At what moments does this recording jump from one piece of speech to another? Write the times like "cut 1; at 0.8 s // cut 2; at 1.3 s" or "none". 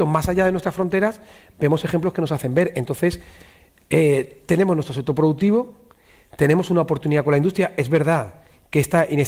none